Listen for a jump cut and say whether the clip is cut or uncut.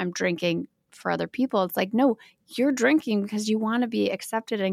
uncut